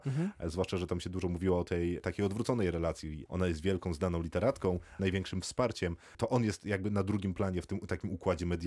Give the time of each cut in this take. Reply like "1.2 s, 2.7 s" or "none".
3.3 s, 5.0 s